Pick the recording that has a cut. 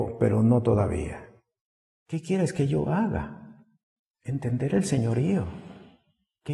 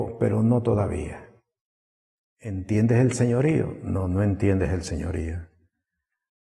first; 1 cut; at 1.9 s

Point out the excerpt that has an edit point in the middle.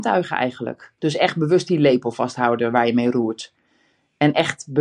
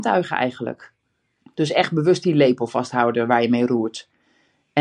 first; 1 cut; at 1.0 s

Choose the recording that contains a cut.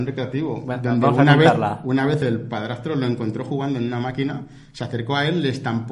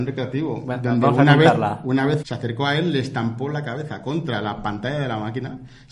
second; 1 cut; at 2.2 s

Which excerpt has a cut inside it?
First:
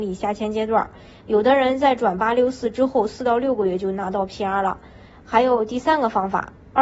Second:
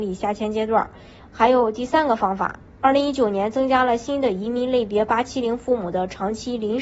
second; 1 cut; at 1.2 s

